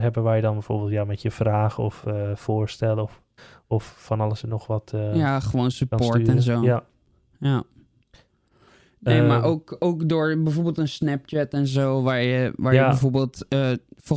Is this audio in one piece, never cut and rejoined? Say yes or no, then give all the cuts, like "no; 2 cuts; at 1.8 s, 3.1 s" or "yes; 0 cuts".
yes; 0 cuts